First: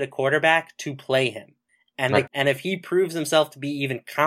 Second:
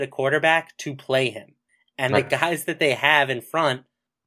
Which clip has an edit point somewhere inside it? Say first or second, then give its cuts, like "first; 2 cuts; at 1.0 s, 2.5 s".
first; 1 cut; at 2.3 s